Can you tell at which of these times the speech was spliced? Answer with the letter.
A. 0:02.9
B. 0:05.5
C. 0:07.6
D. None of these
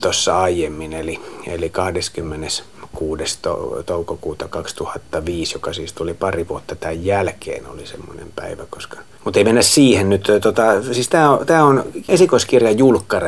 D